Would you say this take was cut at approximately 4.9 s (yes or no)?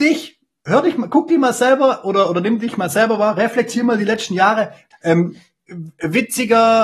yes